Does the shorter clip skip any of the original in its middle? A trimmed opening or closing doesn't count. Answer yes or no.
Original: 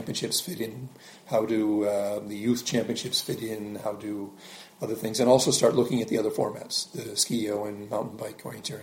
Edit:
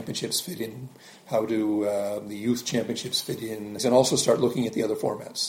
yes